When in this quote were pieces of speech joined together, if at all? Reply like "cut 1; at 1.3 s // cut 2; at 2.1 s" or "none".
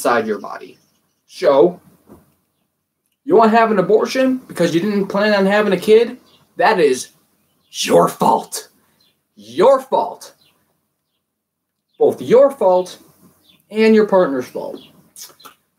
cut 1; at 1.2 s